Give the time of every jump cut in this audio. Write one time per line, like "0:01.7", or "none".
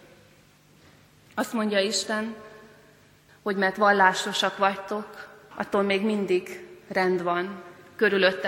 0:03.3
0:05.5